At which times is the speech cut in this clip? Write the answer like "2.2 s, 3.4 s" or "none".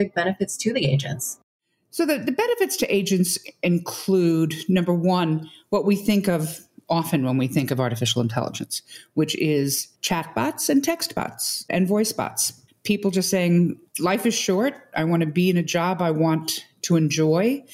9.9 s, 12.7 s, 13.9 s